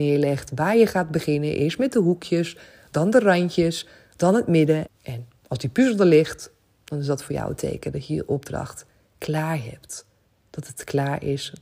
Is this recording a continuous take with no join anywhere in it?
no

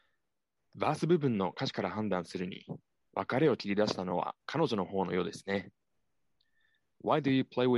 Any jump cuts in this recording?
no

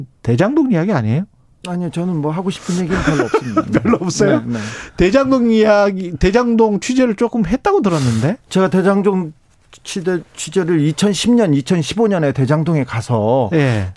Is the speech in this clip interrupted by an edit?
no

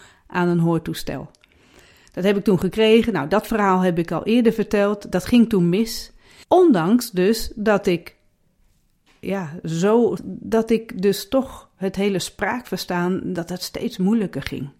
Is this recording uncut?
no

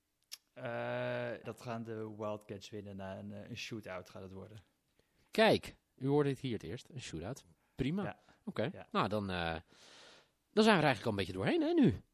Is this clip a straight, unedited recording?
no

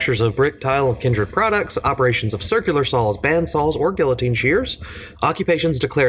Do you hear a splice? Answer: yes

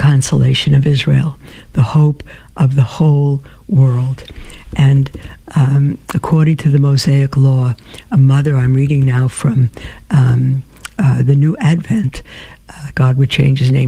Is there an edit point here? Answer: yes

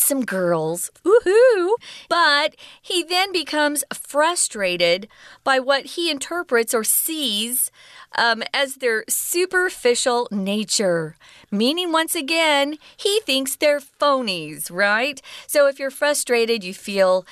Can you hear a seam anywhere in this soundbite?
no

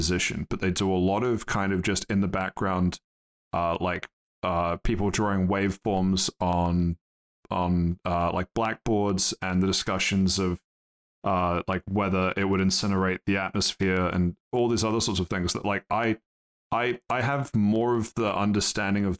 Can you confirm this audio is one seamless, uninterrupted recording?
yes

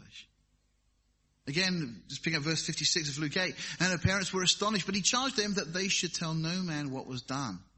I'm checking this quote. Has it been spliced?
no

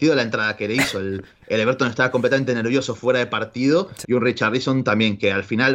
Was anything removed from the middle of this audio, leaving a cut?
yes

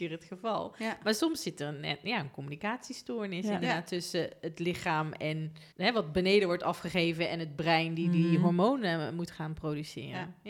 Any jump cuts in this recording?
yes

